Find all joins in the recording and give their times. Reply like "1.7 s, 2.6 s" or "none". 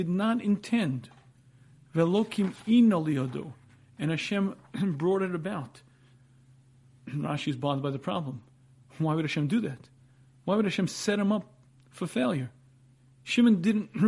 6.1 s